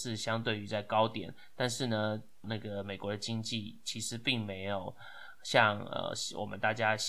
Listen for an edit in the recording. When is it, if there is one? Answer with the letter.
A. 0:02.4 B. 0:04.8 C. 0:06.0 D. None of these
A